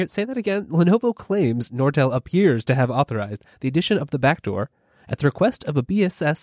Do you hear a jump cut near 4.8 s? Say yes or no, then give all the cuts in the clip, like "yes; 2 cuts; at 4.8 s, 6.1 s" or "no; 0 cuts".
no; 0 cuts